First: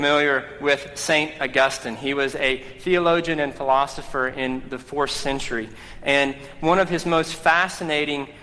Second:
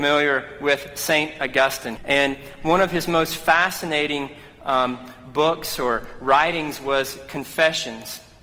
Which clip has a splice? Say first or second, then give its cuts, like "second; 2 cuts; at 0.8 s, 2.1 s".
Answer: second; 1 cut; at 2.0 s